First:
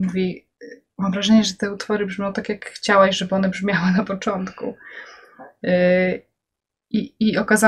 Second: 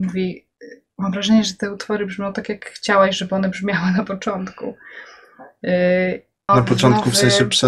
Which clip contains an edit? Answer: second; 1 cut; at 6.5 s

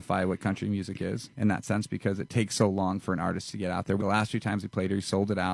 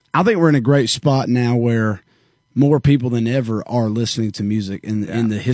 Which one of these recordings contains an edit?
first; 2 cuts; at 1.3 s, 4.0 s

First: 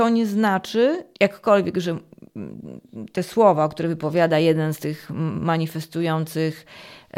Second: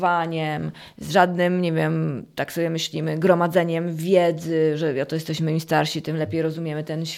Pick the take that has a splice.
first; 1 cut; at 1.1 s

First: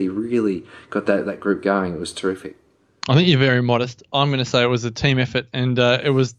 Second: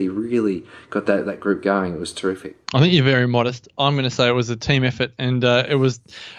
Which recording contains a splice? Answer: second; 1 cut; at 2.6 s

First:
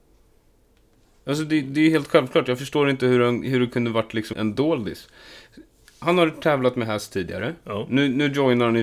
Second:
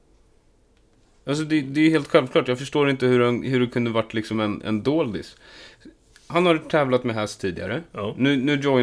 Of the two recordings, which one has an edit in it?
first; 1 cut; at 4.3 s

